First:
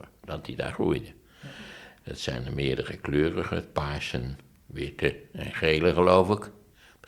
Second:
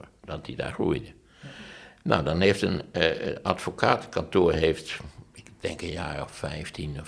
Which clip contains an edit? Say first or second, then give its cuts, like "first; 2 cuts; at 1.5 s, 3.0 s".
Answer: first; 1 cut; at 2.0 s